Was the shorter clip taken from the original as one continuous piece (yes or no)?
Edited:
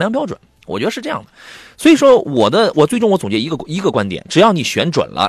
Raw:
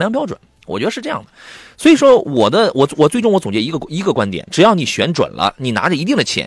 no